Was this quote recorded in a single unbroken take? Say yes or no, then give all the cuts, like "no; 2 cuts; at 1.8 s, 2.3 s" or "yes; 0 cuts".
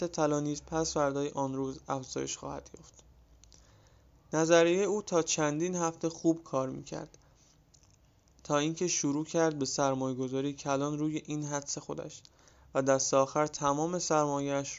yes; 0 cuts